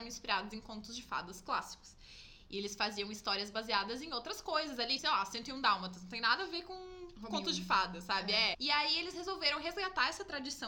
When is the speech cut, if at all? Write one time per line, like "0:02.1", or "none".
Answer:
0:05.0
0:08.5